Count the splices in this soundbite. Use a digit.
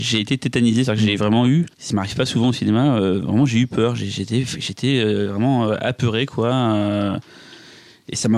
1